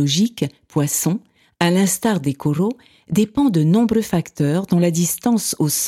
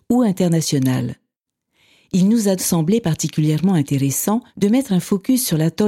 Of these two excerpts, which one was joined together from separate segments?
second; 2 cuts; at 2.6 s, 4.5 s

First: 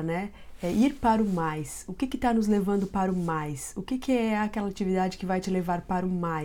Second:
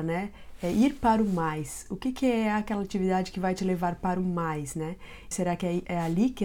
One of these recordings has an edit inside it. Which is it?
second; 2 cuts; at 1.9 s, 5.3 s

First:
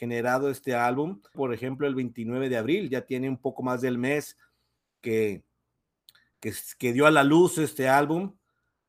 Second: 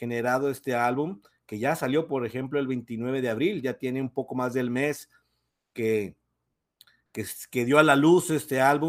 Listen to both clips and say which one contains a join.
first; 1 cut; at 1.3 s

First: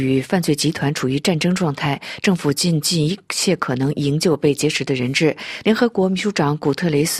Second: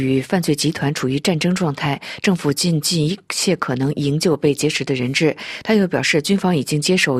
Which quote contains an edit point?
first; 1 cut; at 5.6 s

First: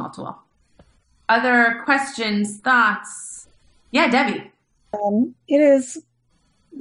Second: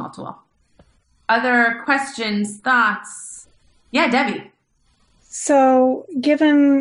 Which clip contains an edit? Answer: first; 1 cut; at 4.9 s

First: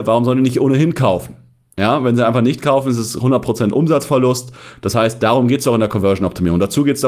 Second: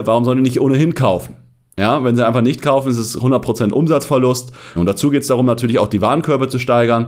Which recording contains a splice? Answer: second; 1 cut; at 4.8 s

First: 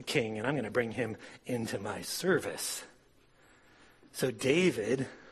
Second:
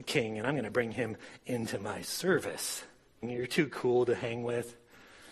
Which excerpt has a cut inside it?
second; 1 cut; at 3.2 s

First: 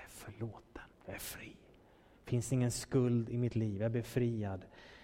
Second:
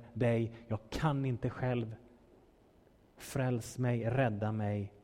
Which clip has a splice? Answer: first; 1 cut; at 0.9 s

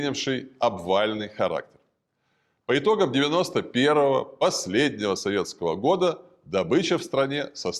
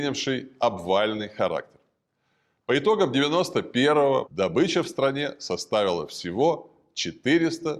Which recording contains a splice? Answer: second; 1 cut; at 4.3 s

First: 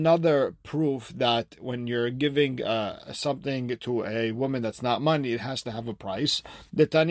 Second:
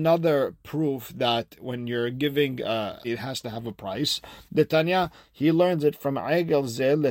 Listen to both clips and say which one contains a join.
second; 1 cut; at 3.0 s

